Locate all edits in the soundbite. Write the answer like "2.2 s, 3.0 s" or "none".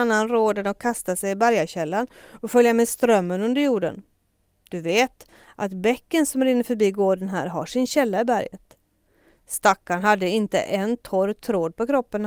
none